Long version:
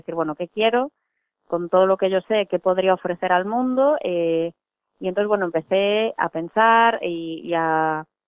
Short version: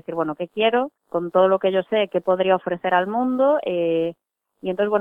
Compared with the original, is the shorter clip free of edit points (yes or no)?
no